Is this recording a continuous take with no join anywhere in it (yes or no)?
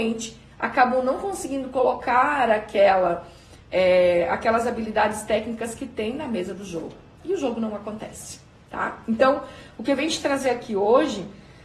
yes